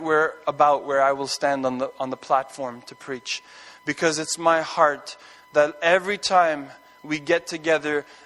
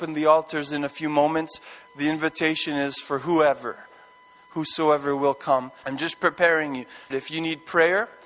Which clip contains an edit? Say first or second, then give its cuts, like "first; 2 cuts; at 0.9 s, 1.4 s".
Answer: second; 2 cuts; at 5.8 s, 7.1 s